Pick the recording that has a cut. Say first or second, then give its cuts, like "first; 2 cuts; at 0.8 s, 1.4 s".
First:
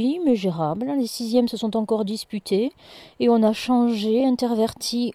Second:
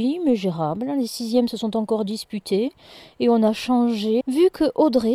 second; 1 cut; at 4.2 s